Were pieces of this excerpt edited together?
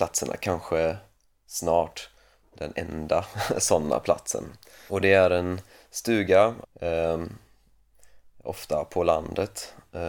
yes; 2 cuts; at 4.9 s, 6.6 s

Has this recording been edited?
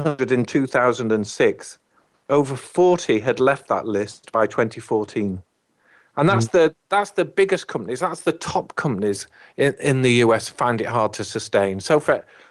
no; 0 cuts

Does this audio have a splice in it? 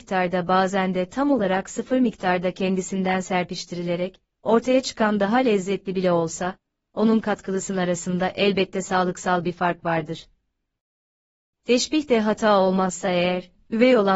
no; 0 cuts

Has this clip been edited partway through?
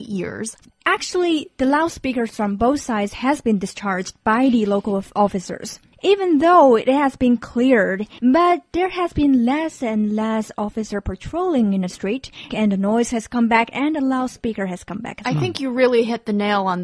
yes; 1 cut; at 12.5 s

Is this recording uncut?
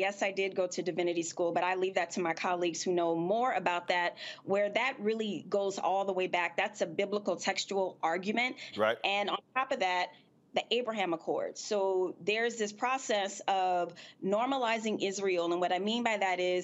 no; 1 cut; at 8.7 s

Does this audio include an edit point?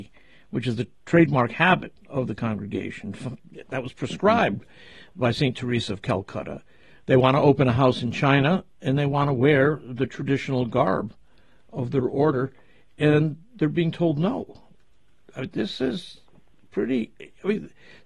no; 0 cuts

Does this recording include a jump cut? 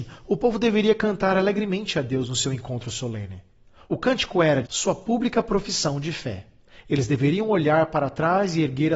yes; 1 cut; at 4.6 s

